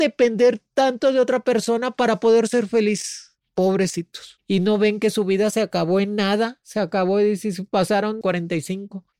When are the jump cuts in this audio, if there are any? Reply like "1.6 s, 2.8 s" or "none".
8.2 s